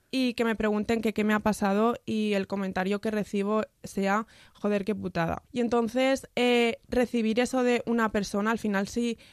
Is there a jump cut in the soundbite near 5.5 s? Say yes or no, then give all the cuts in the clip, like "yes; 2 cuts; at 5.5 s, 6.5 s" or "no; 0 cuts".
yes; 1 cut; at 5.5 s